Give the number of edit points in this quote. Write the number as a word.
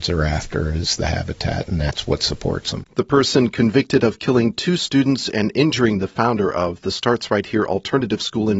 one